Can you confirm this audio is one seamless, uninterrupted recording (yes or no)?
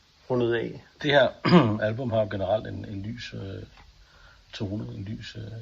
yes